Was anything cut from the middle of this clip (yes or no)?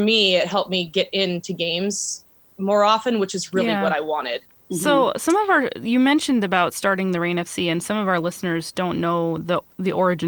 yes